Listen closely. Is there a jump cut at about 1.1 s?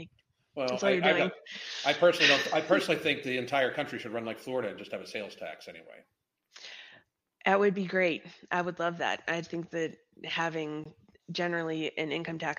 no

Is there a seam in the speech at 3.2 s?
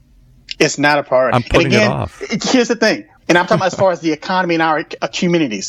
yes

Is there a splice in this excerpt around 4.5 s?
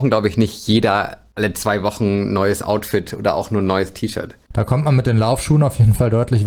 yes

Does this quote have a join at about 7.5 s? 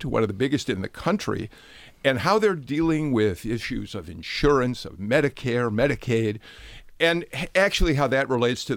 no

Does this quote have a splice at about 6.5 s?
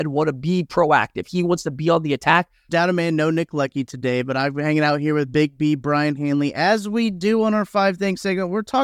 no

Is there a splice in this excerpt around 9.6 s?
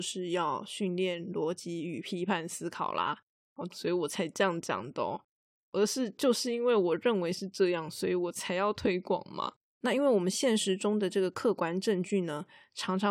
yes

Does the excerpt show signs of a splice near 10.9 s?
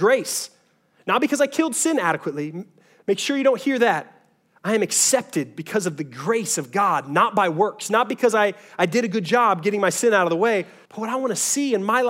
yes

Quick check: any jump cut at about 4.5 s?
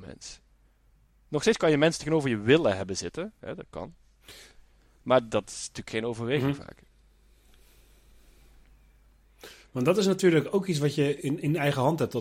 no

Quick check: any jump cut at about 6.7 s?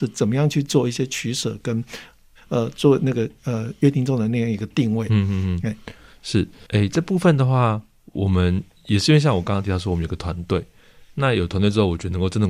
yes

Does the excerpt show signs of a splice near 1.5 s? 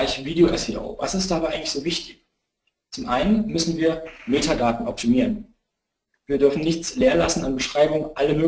no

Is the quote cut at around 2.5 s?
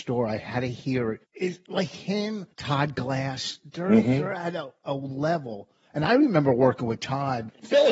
yes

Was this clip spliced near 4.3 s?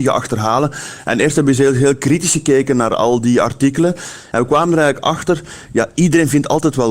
no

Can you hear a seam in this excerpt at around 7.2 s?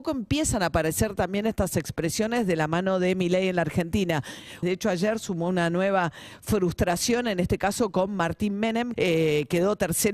no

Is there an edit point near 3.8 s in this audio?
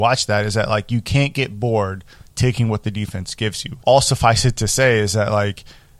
yes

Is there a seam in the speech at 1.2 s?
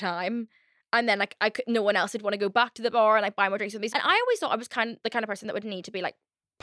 no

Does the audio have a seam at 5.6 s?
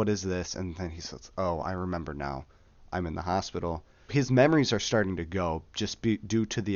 no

